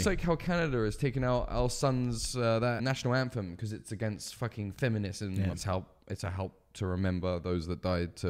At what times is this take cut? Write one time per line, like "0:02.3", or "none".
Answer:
0:02.8
0:05.5